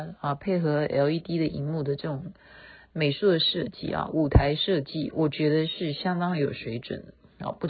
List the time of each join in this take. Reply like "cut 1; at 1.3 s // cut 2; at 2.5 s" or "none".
none